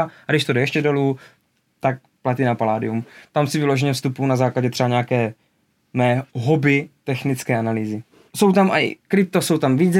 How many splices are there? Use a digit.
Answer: 1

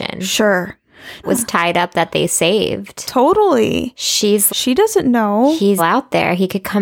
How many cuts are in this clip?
3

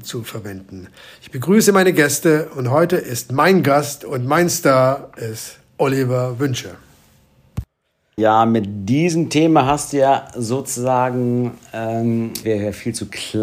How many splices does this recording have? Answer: 2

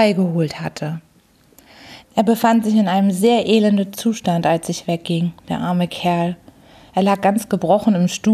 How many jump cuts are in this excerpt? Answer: 1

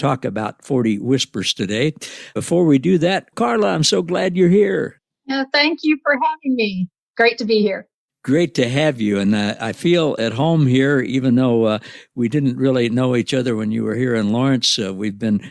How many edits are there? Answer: 1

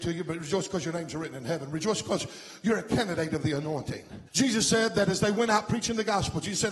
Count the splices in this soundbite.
1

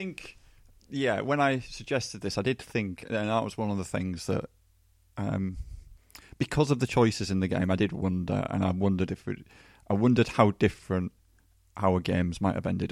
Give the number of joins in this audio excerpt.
0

